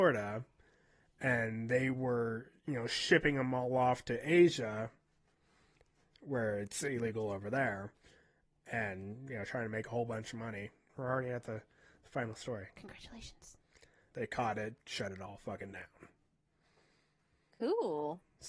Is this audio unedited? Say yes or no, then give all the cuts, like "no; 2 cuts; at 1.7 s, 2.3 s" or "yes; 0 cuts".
no; 2 cuts; at 10.9 s, 14.1 s